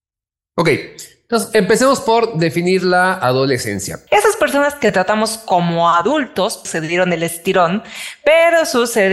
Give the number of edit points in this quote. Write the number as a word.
two